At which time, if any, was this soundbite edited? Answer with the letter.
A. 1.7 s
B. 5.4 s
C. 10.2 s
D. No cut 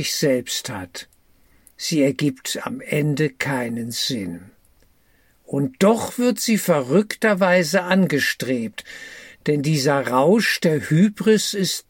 A